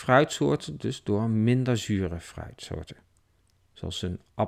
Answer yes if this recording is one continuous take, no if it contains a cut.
yes